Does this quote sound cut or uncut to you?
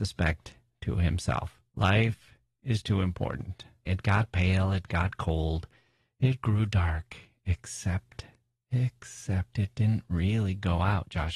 cut